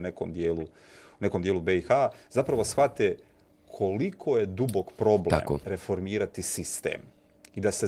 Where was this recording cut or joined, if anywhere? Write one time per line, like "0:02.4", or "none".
0:05.6